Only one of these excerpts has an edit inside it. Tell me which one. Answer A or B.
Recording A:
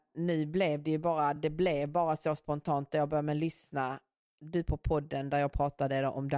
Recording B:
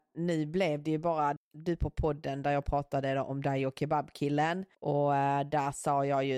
B